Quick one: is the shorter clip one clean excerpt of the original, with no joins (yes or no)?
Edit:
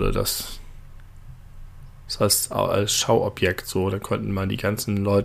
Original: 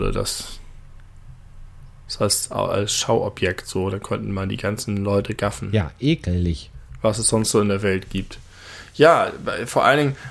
yes